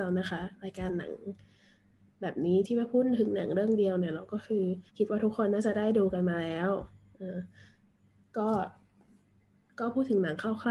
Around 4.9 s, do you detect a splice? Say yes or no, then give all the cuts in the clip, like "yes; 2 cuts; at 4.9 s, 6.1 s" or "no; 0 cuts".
yes; 1 cut; at 4.9 s